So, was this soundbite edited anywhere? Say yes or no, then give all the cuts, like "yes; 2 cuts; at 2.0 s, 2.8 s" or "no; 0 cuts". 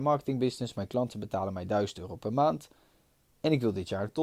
no; 0 cuts